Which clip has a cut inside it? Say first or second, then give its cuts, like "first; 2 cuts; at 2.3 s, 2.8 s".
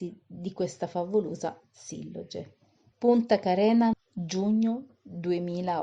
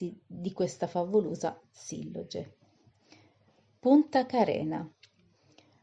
first; 2 cuts; at 2.9 s, 3.9 s